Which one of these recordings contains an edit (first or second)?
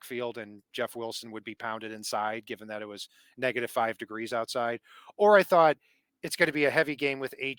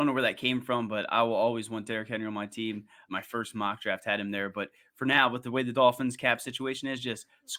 second